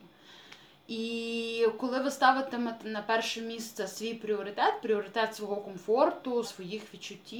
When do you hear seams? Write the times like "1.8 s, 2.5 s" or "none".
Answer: 6.4 s